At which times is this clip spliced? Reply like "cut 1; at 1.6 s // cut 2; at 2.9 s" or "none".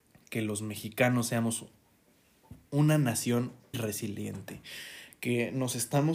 cut 1; at 3.7 s